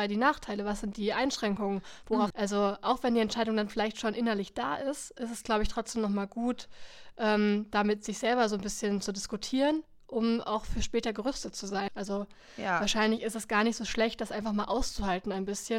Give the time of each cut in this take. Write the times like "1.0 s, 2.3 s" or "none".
2.3 s, 11.9 s